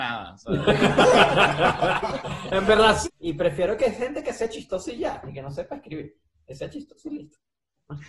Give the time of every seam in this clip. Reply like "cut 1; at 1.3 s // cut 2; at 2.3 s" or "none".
cut 1; at 3.0 s